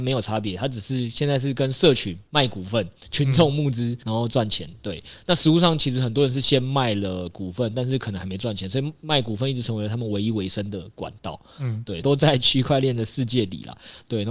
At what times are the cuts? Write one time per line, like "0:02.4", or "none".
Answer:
0:12.0